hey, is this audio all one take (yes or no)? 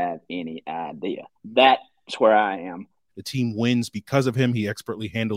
no